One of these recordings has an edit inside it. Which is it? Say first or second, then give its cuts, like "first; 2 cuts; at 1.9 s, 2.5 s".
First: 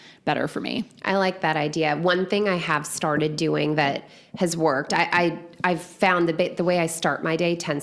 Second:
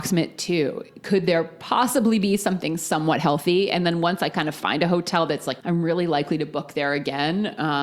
second; 1 cut; at 5.6 s